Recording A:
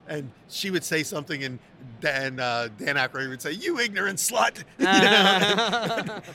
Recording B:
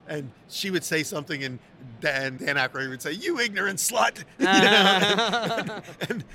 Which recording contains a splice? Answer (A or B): B